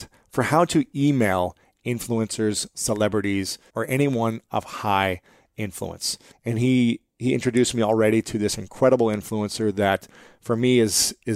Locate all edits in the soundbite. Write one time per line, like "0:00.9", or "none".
0:03.7
0:06.3

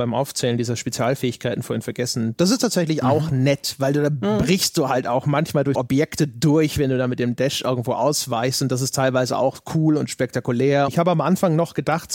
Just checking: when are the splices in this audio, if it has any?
0:05.7
0:10.9

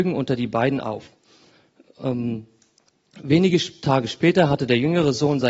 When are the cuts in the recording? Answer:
none

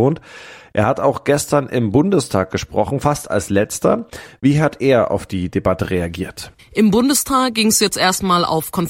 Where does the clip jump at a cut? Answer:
0:06.6

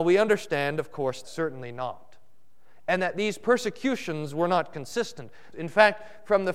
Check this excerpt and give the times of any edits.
0:01.2
0:05.5

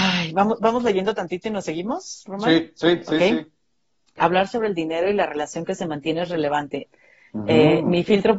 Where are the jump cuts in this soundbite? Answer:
0:04.2
0:06.8

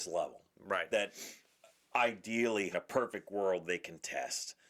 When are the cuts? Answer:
0:00.9
0:02.7

